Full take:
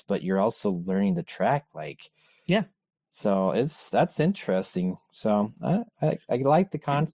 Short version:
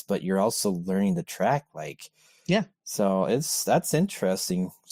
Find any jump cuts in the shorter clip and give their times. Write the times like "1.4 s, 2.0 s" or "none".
2.7 s